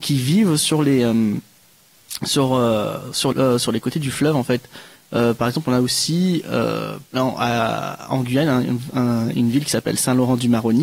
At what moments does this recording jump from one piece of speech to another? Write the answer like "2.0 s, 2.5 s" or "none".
3.3 s, 7.1 s